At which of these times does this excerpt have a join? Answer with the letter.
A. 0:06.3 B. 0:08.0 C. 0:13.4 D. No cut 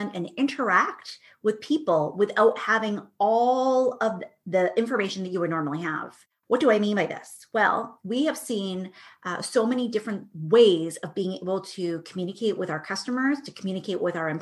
D